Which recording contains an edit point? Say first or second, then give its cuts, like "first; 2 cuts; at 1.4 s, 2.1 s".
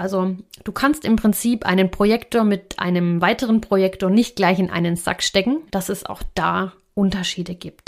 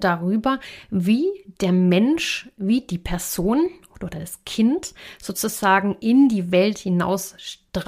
first; 1 cut; at 5.7 s